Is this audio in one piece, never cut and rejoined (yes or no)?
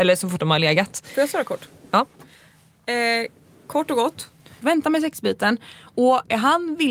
no